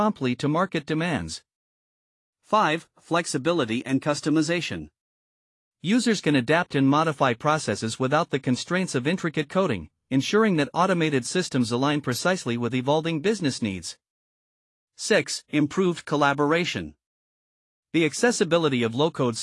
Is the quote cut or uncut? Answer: cut